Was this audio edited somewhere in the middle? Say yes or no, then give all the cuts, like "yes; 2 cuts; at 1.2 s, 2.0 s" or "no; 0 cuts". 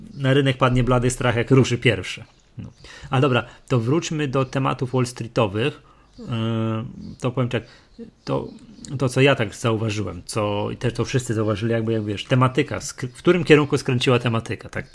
no; 0 cuts